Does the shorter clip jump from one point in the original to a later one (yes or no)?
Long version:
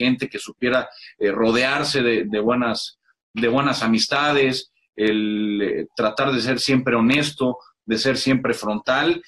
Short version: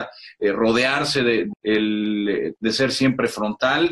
yes